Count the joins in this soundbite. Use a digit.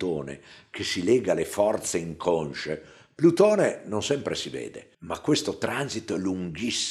1